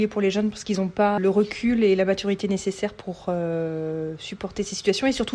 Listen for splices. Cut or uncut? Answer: cut